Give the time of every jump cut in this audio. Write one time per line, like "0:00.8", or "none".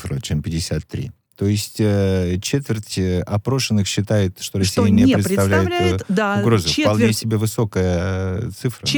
none